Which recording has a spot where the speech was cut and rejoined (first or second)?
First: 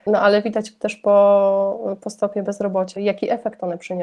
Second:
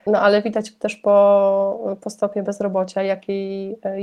first